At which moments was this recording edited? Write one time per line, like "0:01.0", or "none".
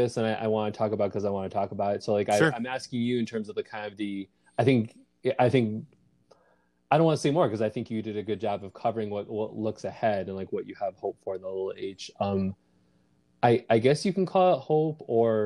none